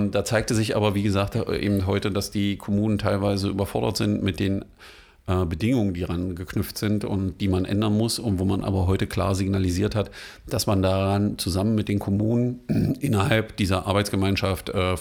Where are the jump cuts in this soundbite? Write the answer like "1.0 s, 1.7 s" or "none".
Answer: none

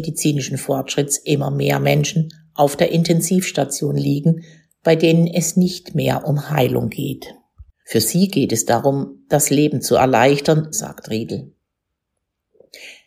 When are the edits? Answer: 7.8 s, 10.7 s

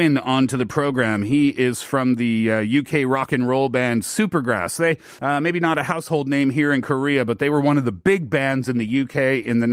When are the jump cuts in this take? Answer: 5.2 s

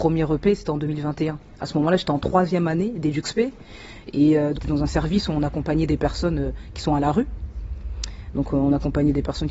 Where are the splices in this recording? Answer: 4.5 s

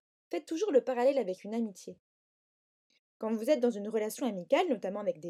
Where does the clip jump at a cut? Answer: none

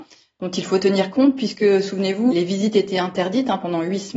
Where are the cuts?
2.3 s

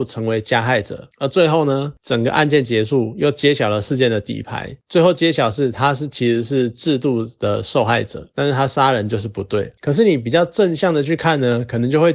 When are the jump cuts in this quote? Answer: 8.3 s

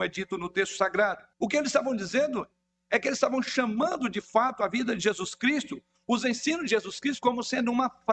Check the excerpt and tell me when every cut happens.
1.3 s

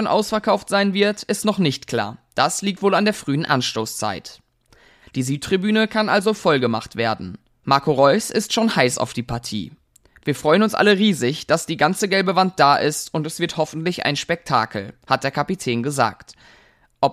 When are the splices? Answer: 5.0 s

